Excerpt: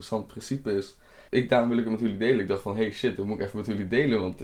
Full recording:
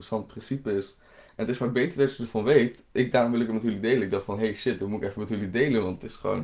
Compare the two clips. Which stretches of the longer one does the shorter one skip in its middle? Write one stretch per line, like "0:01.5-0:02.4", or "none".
0:01.3-0:02.9